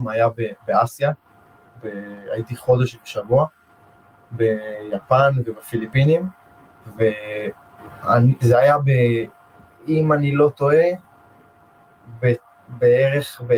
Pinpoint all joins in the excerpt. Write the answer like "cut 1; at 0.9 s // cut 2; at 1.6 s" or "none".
none